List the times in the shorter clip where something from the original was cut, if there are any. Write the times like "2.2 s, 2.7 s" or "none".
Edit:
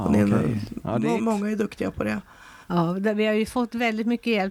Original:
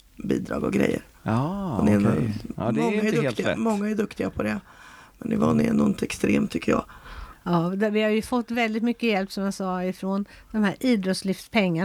1.2 s, 2.6 s